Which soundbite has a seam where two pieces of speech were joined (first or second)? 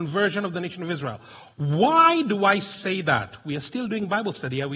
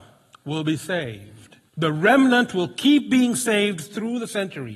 second